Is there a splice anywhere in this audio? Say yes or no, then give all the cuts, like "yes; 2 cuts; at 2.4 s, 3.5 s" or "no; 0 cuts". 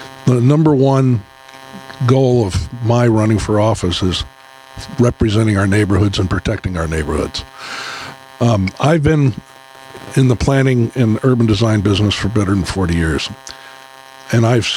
no; 0 cuts